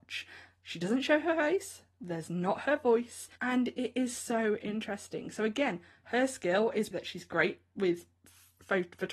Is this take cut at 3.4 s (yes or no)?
yes